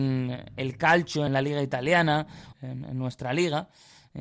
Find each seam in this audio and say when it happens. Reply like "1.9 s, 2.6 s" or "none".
1.3 s, 2.5 s